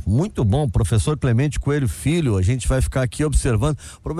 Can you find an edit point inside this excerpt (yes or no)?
no